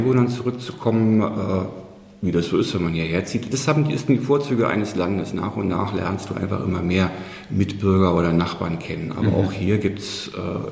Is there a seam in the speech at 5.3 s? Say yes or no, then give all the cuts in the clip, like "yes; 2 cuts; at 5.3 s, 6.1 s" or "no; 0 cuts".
no; 0 cuts